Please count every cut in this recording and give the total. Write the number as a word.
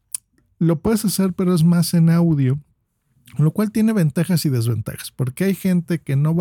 zero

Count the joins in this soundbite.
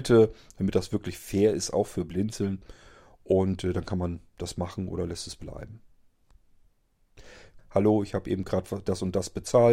one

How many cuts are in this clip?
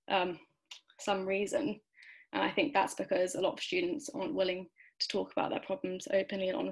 zero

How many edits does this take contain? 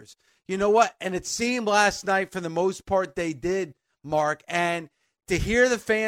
zero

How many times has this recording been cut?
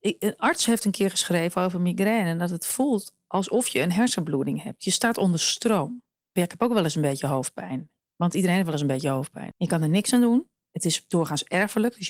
two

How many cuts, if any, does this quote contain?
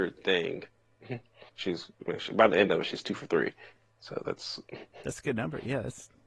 one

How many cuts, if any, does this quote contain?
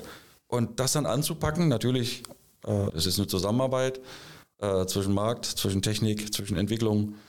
one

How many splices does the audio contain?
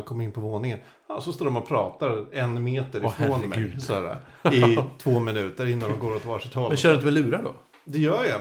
zero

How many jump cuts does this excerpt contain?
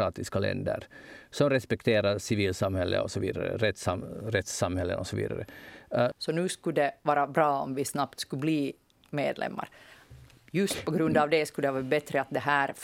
one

